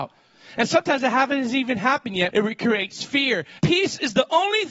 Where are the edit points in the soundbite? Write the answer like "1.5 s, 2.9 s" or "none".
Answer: 2.3 s, 3.6 s